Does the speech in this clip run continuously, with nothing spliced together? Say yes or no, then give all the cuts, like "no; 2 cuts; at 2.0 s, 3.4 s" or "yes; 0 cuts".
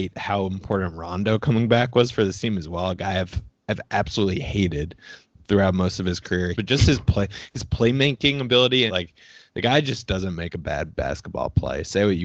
no; 2 cuts; at 6.5 s, 8.9 s